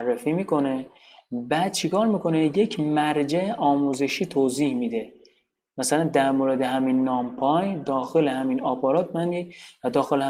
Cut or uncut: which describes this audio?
uncut